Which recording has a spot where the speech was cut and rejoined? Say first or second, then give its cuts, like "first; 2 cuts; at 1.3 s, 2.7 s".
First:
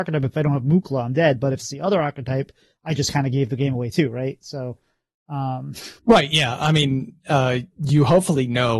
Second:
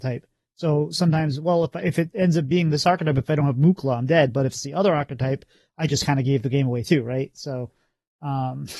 first; 1 cut; at 6.0 s